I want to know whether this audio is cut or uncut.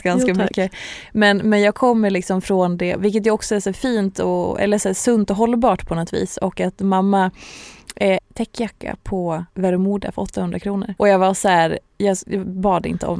cut